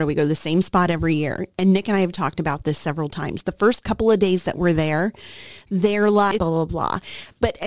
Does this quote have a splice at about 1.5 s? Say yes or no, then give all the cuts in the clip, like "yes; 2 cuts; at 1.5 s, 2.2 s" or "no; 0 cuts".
no; 1 cut; at 6.4 s